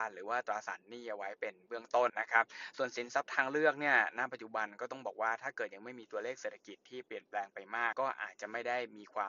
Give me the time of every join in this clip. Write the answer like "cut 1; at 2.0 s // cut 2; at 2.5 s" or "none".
cut 1; at 2.1 s // cut 2; at 7.9 s